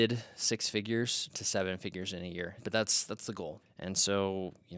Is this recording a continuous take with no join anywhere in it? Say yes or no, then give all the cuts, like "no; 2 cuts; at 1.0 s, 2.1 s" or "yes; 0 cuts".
no; 2 cuts; at 2.6 s, 3.6 s